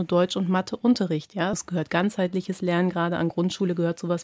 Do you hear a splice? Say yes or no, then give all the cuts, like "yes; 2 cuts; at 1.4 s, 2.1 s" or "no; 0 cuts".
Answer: yes; 1 cut; at 1.5 s